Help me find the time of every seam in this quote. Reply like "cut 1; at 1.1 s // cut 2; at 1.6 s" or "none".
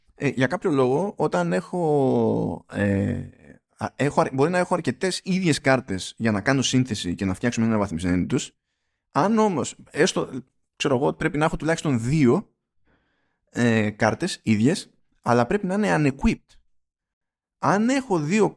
none